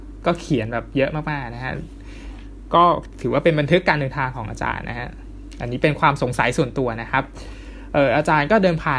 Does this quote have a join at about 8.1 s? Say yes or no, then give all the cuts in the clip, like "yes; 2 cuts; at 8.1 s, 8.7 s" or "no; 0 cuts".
no; 0 cuts